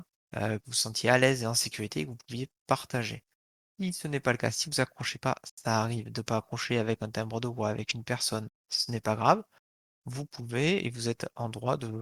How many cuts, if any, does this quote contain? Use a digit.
1